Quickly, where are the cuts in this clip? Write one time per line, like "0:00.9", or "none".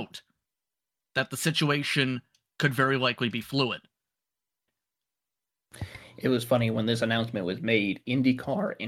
0:04.7